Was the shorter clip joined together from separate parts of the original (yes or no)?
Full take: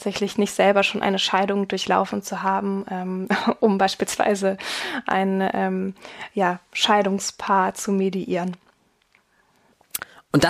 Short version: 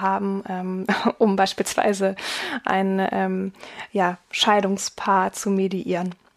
no